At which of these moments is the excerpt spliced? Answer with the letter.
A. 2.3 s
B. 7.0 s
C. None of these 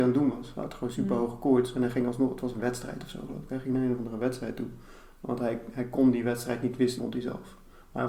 B